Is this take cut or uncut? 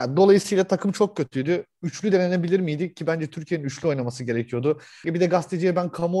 cut